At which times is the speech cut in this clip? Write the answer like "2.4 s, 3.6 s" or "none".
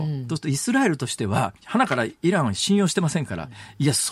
1.6 s